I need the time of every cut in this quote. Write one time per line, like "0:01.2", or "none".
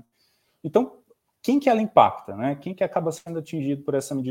none